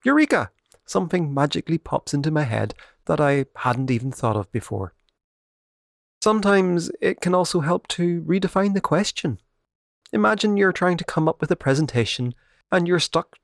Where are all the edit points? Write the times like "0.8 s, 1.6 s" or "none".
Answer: none